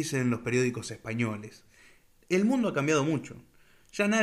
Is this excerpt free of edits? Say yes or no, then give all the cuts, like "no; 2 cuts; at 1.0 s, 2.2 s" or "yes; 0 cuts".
no; 1 cut; at 2.2 s